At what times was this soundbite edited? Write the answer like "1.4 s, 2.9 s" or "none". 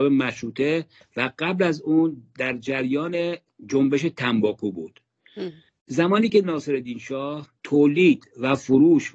7.6 s